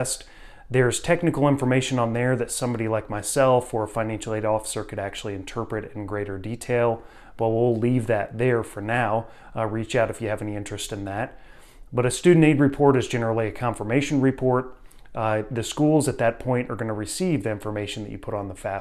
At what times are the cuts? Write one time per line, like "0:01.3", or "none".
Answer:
none